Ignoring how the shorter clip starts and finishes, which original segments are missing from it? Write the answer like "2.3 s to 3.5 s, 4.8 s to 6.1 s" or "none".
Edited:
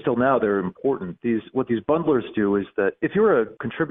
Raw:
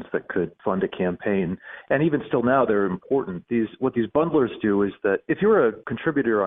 none